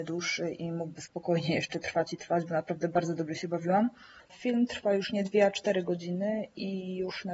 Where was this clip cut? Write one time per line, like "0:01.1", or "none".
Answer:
0:04.2